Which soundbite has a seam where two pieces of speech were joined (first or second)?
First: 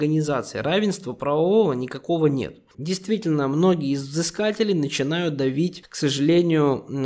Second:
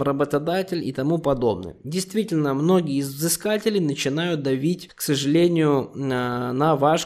first